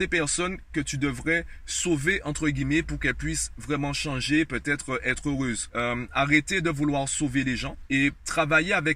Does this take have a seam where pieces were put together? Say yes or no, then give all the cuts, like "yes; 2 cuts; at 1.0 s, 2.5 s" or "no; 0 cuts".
yes; 1 cut; at 5.7 s